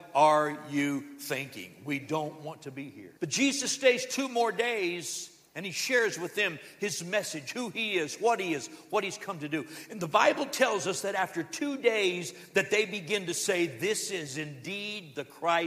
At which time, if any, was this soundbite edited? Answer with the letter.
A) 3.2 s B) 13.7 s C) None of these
A